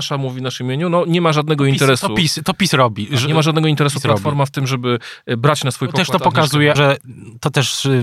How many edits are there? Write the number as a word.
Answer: one